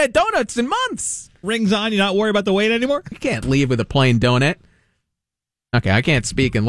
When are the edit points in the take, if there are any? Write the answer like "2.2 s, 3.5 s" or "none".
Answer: 3.1 s